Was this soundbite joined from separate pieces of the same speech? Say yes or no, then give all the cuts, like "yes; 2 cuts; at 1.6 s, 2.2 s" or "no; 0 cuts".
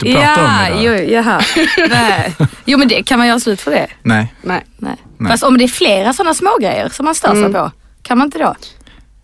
no; 0 cuts